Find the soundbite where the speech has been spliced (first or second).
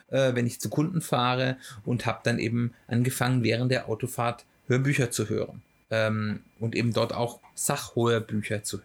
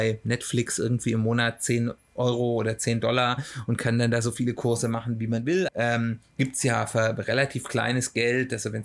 second